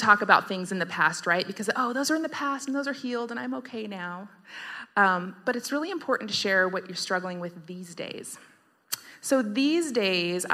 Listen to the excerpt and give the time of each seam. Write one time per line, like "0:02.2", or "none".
none

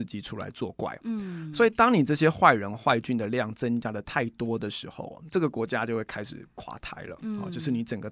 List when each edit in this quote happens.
none

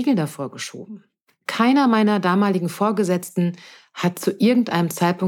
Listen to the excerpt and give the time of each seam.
none

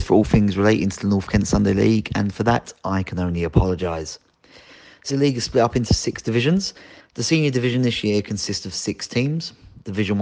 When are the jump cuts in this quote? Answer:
0:05.1
0:07.0

